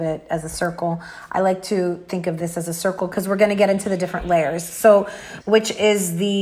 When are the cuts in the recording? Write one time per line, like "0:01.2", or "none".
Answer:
0:05.4